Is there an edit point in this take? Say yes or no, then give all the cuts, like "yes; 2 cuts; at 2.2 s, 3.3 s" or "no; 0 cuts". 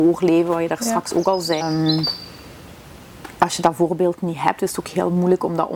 yes; 1 cut; at 1.6 s